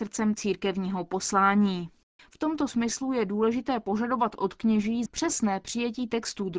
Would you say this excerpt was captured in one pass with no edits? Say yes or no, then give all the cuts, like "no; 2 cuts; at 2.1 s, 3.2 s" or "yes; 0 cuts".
no; 2 cuts; at 2.2 s, 5.1 s